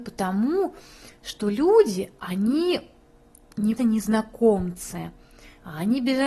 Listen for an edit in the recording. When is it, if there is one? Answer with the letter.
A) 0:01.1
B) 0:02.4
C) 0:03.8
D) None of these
C